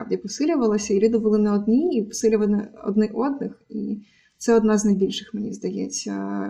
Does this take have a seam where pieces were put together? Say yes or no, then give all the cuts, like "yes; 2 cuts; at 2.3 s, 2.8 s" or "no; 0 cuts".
no; 0 cuts